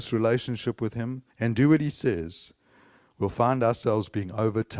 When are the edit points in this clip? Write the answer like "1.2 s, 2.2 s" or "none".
1.3 s